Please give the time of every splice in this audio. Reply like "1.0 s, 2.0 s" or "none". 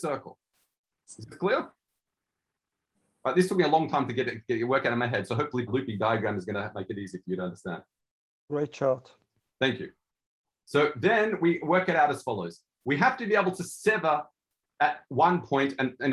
5.7 s